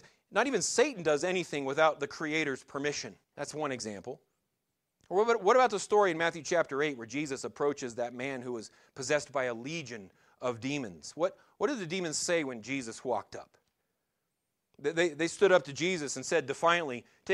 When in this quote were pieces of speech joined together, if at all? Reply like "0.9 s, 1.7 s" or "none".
3.2 s